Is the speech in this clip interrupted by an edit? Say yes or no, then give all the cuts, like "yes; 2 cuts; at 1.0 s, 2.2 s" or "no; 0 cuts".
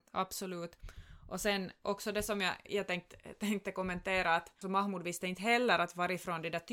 yes; 2 cuts; at 2.7 s, 4.6 s